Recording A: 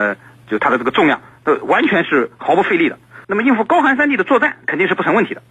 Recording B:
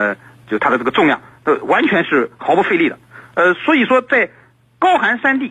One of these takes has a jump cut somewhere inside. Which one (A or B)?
A